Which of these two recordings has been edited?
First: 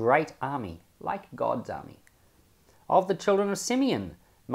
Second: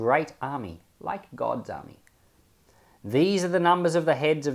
first; 1 cut; at 2.8 s

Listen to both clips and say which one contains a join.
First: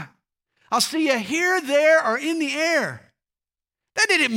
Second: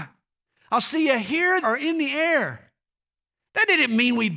second; 1 cut; at 1.6 s

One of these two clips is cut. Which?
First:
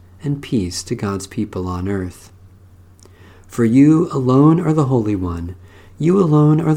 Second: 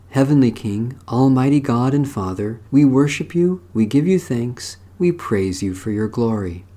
second; 1 cut; at 2.7 s

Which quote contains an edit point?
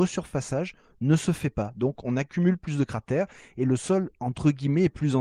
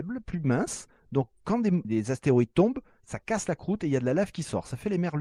second; 1 cut; at 1.8 s

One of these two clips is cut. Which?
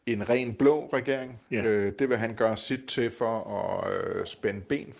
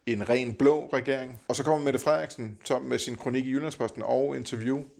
second; 1 cut; at 1.5 s

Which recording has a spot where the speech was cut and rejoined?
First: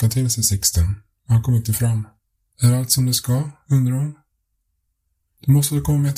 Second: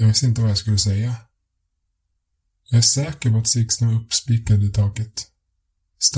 first; 1 cut; at 2.5 s

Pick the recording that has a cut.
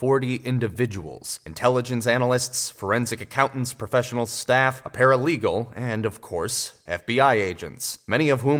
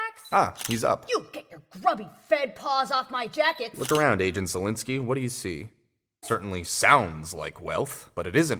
second; 1 cut; at 6.2 s

